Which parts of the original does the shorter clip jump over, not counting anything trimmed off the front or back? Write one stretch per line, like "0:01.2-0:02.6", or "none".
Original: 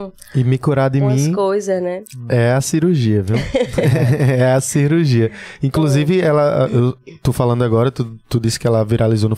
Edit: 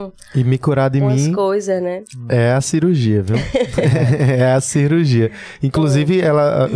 none